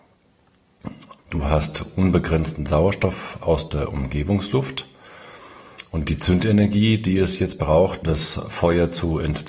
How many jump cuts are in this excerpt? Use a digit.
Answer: 2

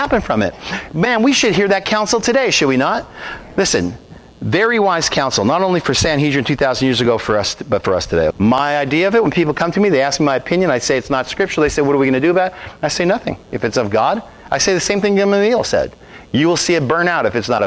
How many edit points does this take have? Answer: 1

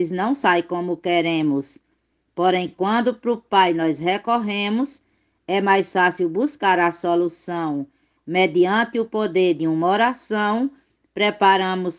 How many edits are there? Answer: 0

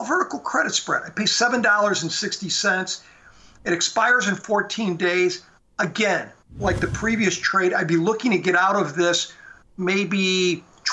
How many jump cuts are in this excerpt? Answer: 0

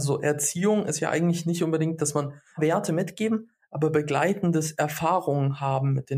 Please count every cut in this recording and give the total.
1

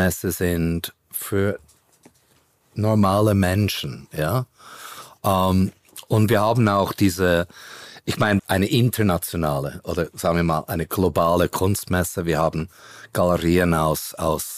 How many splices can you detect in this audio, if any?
1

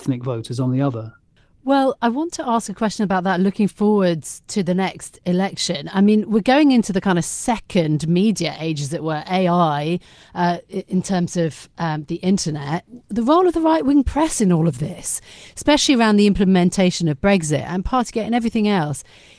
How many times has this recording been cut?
0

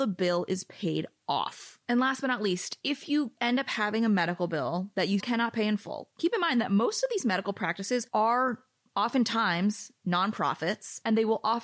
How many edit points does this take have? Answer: 2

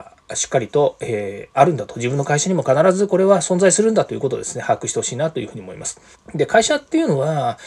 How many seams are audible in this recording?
1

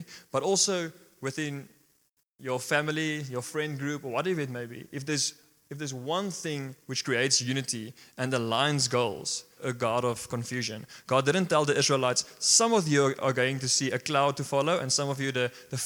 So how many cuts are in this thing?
1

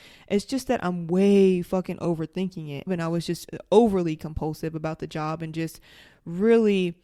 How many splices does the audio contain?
1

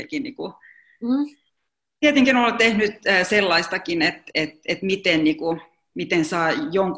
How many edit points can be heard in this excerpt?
0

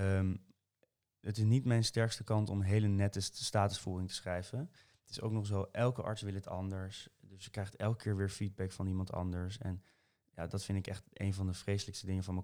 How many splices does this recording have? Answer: 1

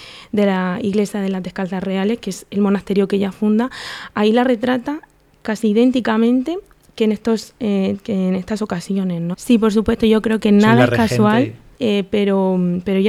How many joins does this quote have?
2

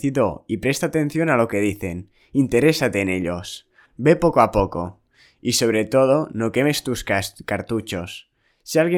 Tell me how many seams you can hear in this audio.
1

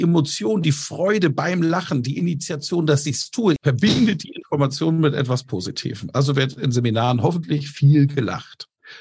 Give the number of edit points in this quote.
1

